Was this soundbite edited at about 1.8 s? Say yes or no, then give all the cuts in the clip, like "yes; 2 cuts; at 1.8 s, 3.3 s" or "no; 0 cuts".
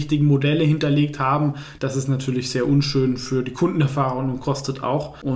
yes; 1 cut; at 1.8 s